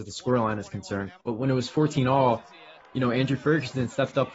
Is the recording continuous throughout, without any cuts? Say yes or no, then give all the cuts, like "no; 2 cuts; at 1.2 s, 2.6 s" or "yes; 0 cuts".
no; 1 cut; at 1.2 s